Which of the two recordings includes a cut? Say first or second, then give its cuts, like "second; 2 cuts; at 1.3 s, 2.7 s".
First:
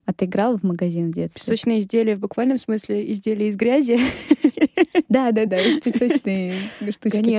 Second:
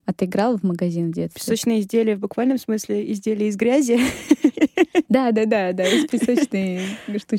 first; 1 cut; at 5.5 s